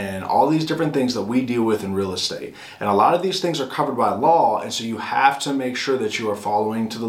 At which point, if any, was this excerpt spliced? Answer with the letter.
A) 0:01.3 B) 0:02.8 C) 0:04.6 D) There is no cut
D